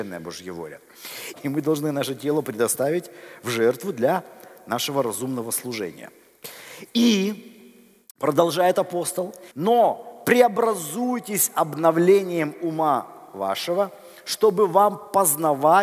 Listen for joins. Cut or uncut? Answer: cut